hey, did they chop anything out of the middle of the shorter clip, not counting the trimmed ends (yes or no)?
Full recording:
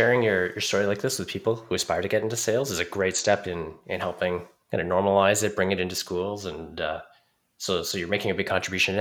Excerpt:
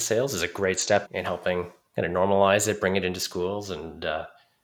yes